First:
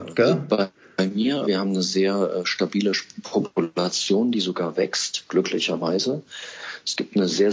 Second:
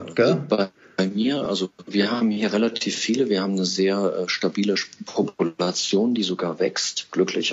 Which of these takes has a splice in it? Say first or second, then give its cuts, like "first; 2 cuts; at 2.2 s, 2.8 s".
first; 1 cut; at 1.5 s